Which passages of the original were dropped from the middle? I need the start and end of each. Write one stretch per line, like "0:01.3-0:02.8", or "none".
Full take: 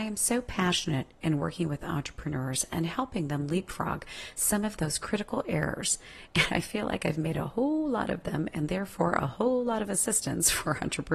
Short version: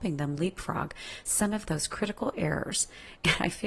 none